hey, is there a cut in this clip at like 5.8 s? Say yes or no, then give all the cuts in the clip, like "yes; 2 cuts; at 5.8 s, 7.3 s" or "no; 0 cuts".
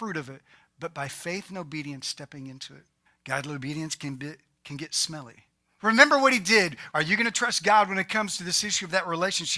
yes; 3 cuts; at 3.1 s, 5.8 s, 6.9 s